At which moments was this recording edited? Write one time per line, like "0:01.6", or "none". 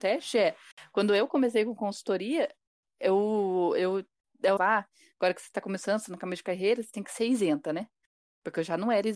0:04.6